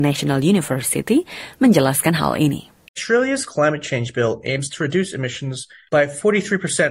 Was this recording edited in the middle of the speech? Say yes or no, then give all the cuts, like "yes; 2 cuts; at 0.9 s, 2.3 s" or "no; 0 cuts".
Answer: no; 0 cuts